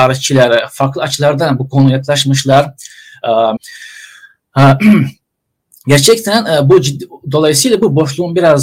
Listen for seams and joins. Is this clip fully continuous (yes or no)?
no